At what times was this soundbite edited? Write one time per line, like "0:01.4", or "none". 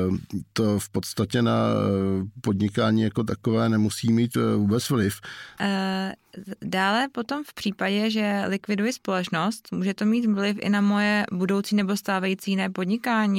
0:05.6